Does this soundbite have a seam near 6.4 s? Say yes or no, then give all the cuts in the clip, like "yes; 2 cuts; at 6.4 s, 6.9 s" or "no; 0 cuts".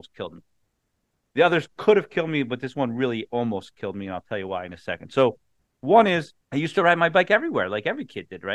yes; 1 cut; at 6.4 s